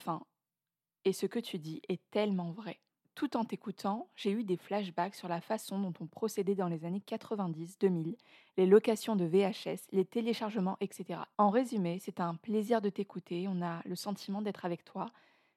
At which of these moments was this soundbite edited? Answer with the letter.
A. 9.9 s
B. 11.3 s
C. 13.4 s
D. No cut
B